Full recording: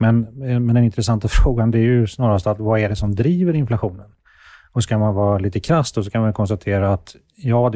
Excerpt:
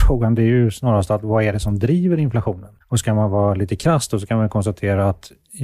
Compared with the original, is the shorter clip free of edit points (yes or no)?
no